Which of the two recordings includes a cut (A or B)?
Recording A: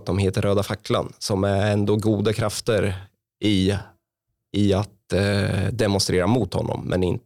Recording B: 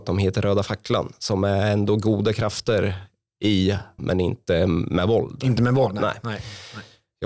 B